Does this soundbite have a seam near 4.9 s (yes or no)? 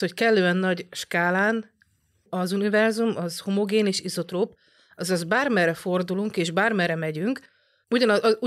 no